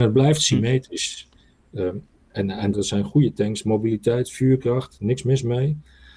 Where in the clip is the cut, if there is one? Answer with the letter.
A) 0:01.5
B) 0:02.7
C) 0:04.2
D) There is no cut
B